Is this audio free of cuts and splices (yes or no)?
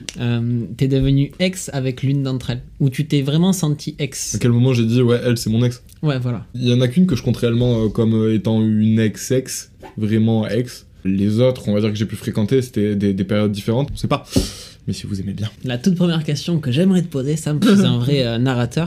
no